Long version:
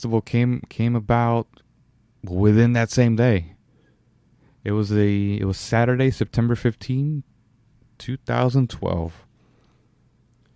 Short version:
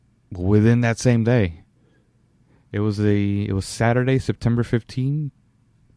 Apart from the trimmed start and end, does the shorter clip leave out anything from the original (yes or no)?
no